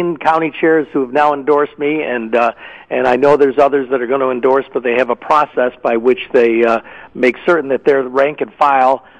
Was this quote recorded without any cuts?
yes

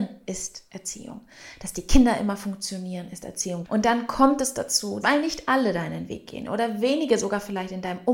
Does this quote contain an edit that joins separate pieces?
yes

